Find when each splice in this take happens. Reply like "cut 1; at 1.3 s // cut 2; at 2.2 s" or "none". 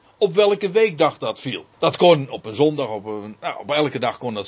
cut 1; at 1.7 s